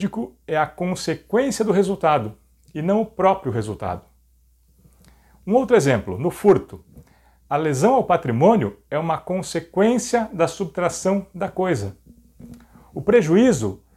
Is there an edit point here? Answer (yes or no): no